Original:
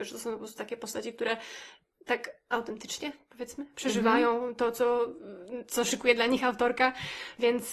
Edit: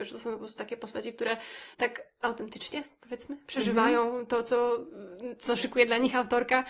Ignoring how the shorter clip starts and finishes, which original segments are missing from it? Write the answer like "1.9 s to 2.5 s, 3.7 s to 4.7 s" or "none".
1.7 s to 2.0 s